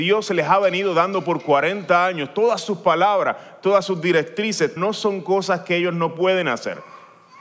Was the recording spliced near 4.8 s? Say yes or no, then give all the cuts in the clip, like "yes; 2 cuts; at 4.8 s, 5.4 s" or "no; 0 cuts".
yes; 1 cut; at 4.8 s